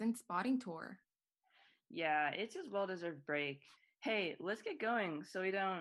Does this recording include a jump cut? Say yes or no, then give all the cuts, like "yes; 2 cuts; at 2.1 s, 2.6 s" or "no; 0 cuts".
no; 0 cuts